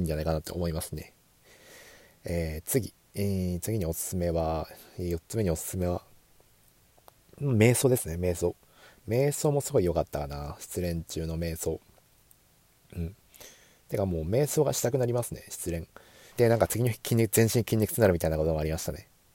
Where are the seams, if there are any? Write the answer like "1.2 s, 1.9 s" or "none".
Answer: 16.3 s

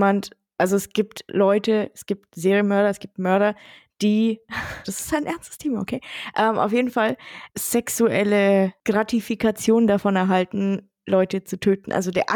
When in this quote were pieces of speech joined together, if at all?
4.8 s, 7.5 s

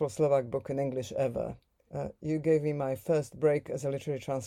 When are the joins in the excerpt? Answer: 1.9 s

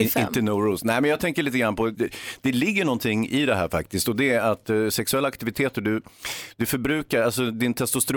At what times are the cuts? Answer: 1.9 s

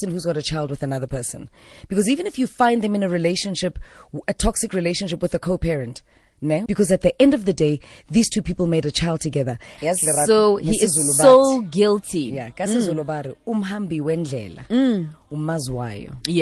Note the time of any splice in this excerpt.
6.7 s, 9.8 s

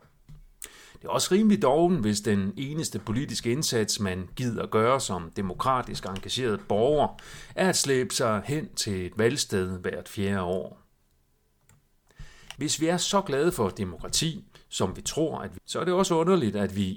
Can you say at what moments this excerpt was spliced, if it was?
12.6 s, 15.6 s

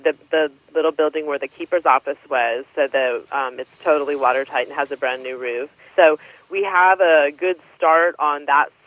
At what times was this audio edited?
5.9 s

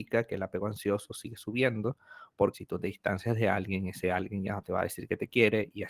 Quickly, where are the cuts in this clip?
2.5 s

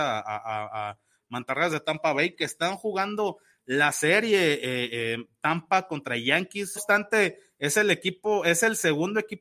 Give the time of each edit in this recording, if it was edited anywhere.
6.8 s

